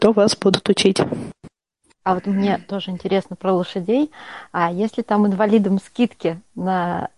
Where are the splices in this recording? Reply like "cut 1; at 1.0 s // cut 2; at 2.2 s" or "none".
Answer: cut 1; at 1.9 s